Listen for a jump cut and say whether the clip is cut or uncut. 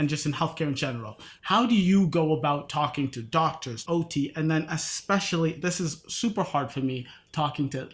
cut